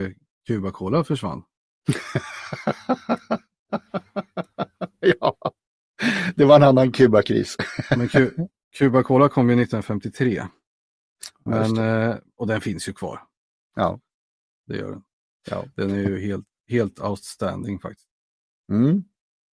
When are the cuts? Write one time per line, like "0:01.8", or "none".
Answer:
none